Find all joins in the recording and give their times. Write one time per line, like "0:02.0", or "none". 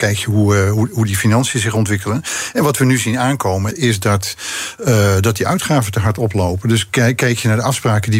0:03.7

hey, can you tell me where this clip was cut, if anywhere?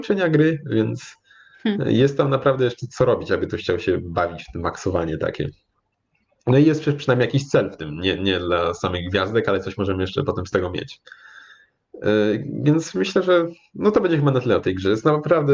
none

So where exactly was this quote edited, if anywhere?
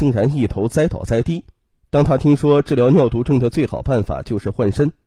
0:01.7

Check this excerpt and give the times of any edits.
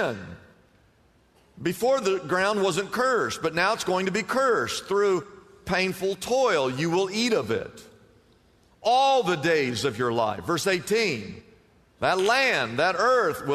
none

